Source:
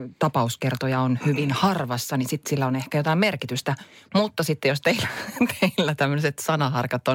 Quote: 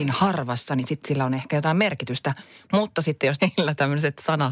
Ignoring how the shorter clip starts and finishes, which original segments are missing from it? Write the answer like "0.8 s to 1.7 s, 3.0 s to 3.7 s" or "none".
4.8 s to 5.6 s